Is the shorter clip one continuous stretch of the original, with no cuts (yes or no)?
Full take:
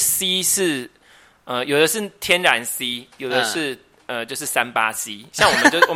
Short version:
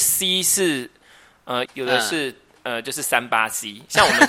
no